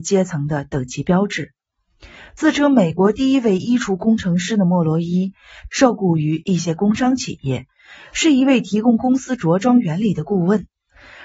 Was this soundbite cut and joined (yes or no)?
yes